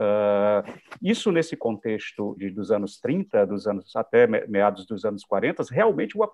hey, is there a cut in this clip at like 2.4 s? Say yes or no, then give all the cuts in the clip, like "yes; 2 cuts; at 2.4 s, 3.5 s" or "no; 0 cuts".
yes; 1 cut; at 2.4 s